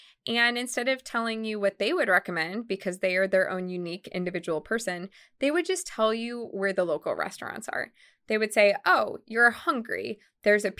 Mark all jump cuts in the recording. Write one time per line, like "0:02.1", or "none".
none